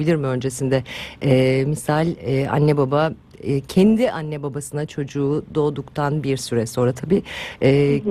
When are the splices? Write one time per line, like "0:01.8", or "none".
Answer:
none